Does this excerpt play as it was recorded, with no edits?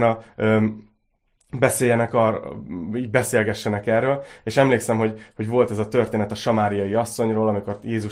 yes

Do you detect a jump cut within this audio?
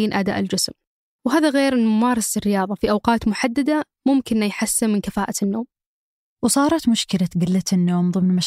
no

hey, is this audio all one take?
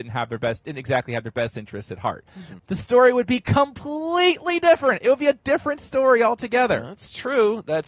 no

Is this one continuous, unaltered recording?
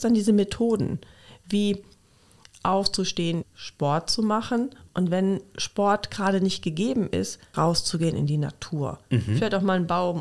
no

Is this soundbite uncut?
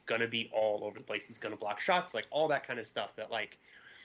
no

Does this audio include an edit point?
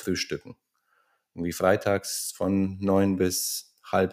no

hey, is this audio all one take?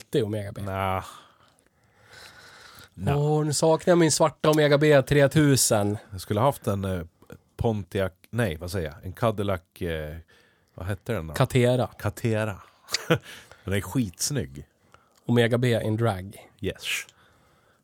yes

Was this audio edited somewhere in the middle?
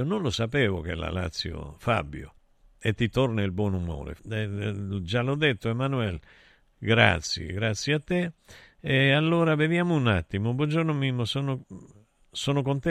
yes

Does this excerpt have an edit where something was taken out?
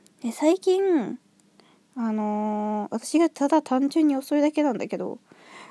yes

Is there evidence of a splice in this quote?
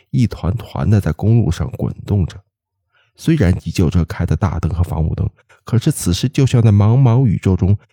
no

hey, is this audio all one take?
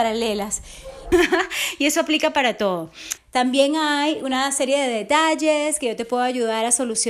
no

